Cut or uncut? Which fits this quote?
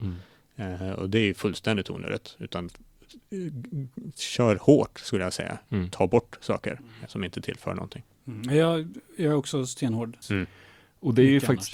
cut